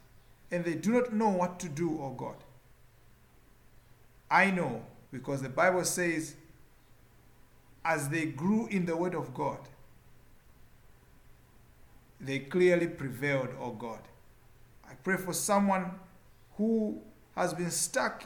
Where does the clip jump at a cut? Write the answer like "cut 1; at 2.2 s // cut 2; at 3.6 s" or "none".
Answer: cut 1; at 5.1 s // cut 2; at 14.8 s